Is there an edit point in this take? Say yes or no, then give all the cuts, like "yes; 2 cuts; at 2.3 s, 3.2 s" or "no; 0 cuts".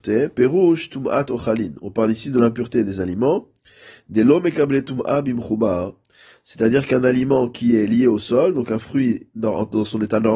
no; 0 cuts